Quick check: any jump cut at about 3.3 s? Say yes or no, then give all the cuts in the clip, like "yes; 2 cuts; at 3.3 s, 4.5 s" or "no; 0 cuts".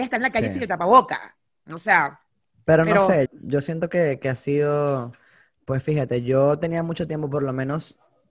yes; 1 cut; at 3.3 s